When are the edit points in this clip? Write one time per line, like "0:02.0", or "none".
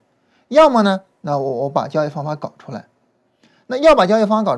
0:01.2